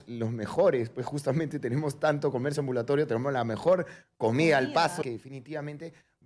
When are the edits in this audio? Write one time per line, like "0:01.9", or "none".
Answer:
0:05.0

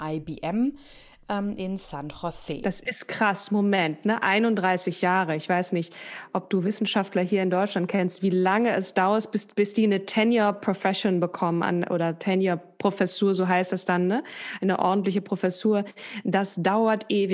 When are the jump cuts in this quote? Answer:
none

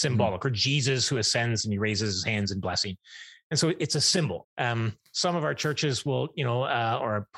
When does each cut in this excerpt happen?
0:04.4

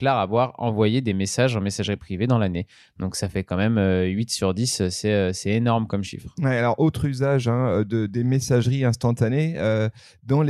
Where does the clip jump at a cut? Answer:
none

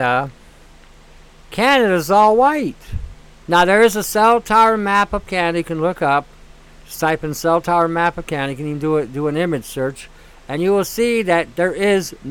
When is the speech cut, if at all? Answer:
0:03.4

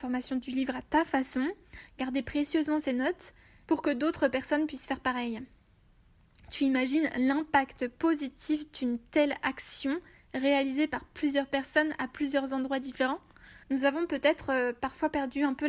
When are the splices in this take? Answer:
0:13.6

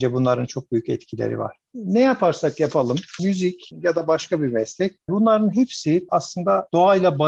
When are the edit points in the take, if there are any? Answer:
0:03.2

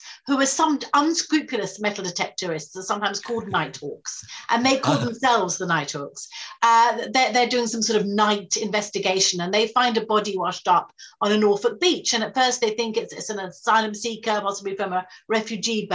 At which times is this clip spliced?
none

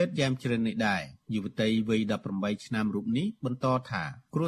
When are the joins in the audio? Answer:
0:01.2

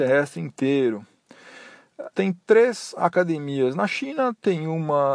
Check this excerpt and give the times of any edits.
0:02.1

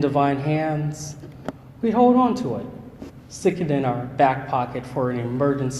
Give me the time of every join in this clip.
none

